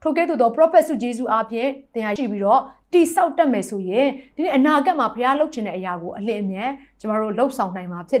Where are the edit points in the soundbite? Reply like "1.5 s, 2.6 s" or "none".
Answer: 2.2 s